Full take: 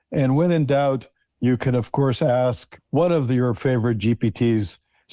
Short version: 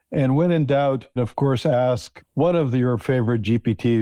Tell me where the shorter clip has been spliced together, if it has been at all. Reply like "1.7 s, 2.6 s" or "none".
1.2 s